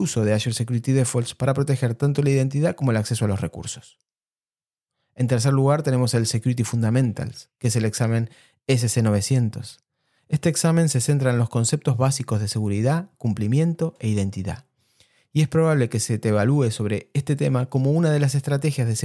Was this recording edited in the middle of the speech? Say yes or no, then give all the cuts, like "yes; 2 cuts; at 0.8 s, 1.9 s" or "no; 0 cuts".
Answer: no; 0 cuts